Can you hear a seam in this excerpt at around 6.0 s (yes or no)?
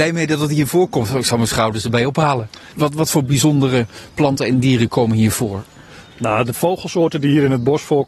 no